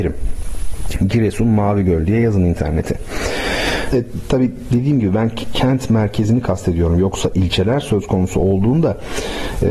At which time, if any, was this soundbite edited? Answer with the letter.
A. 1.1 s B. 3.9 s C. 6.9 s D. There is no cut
B